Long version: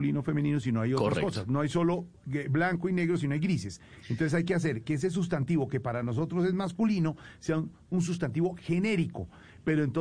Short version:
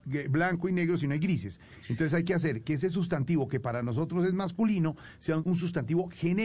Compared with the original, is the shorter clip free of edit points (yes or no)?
no